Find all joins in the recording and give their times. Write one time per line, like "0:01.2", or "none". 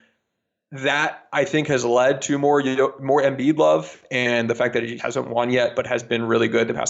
0:05.0